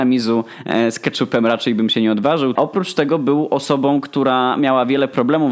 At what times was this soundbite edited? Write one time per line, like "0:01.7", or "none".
0:02.6